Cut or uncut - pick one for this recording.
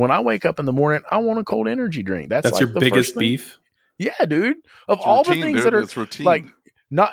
uncut